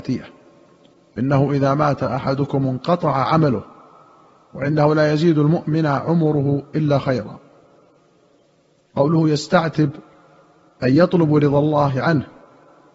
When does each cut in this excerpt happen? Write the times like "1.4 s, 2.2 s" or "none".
none